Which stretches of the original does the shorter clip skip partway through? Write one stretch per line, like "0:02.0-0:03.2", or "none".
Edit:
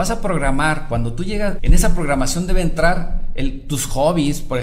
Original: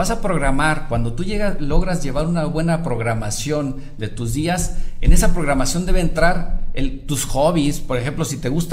0:01.6-0:05.0